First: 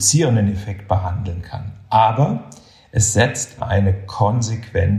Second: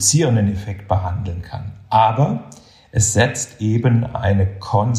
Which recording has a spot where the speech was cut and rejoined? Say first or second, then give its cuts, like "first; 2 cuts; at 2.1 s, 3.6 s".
first; 1 cut; at 3.6 s